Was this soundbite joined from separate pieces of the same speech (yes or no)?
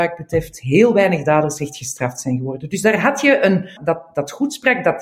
yes